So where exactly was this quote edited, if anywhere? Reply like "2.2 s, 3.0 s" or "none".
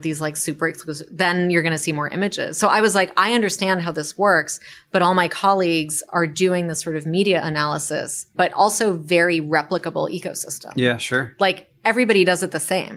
8.3 s